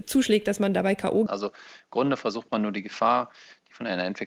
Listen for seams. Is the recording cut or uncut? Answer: cut